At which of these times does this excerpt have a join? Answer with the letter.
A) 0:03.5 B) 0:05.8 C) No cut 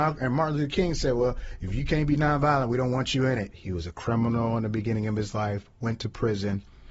A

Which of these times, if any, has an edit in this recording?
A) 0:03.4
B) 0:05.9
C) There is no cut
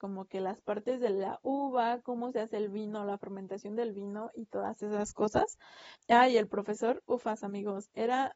B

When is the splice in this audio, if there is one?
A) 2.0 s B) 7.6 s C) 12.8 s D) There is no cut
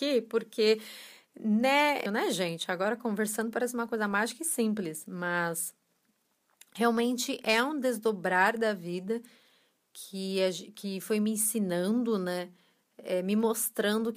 A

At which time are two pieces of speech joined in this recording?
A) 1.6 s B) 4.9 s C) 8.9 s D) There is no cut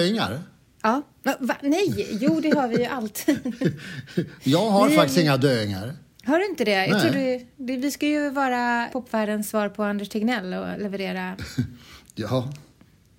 C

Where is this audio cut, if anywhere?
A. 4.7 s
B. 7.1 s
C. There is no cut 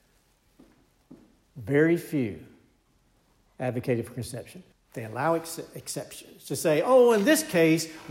A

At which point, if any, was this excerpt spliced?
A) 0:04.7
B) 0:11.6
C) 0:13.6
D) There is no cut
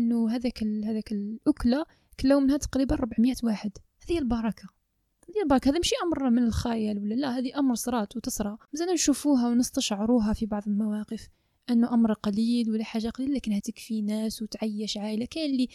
C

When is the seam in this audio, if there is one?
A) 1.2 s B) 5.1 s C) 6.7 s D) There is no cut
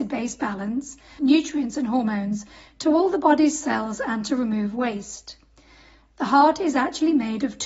A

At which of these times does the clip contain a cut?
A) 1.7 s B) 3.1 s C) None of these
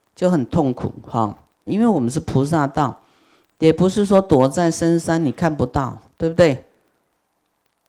A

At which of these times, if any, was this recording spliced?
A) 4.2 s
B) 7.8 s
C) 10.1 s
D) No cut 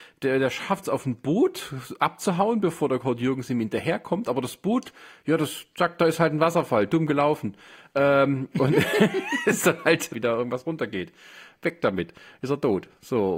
C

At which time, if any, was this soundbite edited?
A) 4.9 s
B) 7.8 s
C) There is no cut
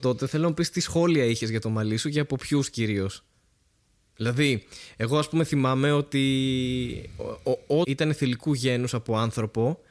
B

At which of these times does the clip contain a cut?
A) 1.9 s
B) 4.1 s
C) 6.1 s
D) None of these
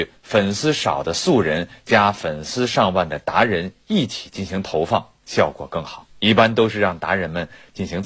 D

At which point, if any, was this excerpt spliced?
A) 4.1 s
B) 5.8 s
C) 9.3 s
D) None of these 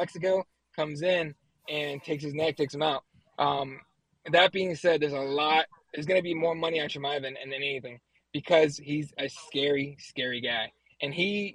D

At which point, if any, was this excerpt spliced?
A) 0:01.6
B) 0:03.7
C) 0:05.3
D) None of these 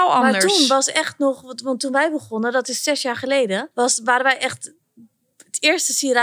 B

